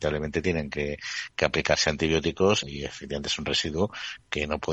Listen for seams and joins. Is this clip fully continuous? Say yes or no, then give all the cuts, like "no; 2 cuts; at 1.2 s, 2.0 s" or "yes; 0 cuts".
no; 1 cut; at 2.6 s